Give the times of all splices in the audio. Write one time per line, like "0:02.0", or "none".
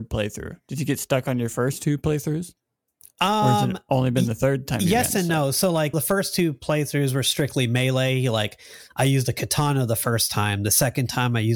0:05.9